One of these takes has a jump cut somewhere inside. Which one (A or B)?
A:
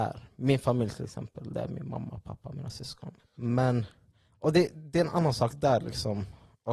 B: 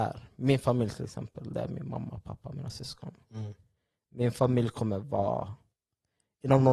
A